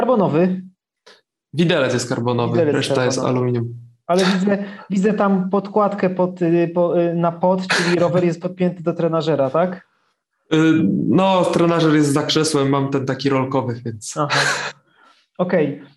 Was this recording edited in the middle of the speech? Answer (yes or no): no